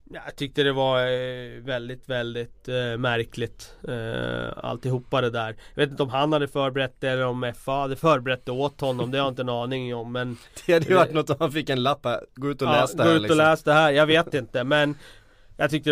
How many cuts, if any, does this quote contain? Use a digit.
0